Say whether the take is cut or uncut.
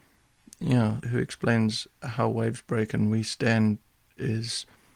cut